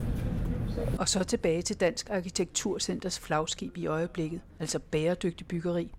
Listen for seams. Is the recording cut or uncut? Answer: cut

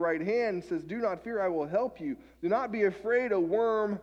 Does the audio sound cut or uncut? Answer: uncut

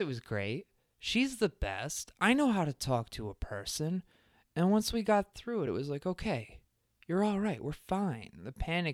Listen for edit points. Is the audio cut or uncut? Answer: uncut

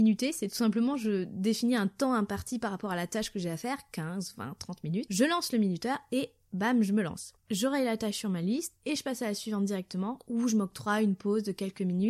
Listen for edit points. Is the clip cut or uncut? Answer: cut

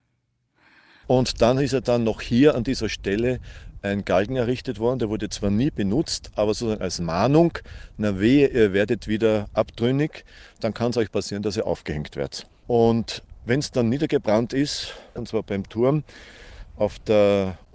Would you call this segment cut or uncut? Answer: cut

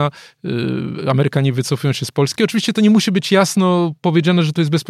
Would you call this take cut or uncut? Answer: uncut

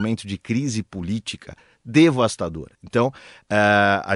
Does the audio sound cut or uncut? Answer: uncut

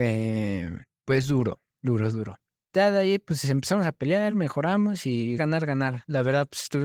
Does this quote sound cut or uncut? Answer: cut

